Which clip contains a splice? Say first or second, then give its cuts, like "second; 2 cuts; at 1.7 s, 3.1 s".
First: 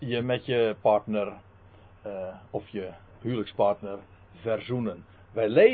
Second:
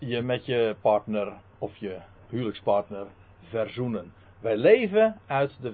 second; 1 cut; at 1.5 s